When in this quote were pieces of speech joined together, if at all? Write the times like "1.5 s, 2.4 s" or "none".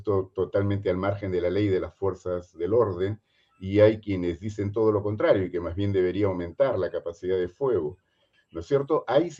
8.3 s